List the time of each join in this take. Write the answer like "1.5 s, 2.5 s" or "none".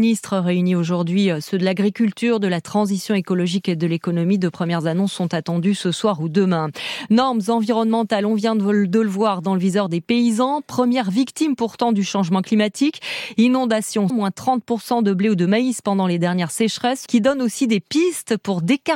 14.1 s, 17.1 s

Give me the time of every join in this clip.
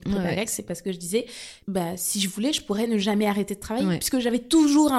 1.6 s

